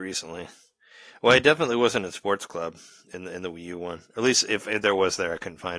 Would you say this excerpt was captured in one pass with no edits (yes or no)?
yes